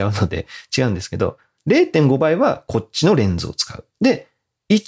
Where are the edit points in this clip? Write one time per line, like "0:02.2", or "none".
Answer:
0:03.9